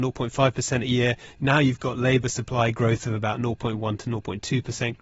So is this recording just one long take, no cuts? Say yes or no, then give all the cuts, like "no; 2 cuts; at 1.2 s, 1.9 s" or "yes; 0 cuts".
yes; 0 cuts